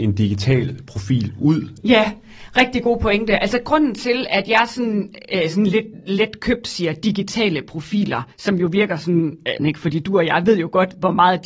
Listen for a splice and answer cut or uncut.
cut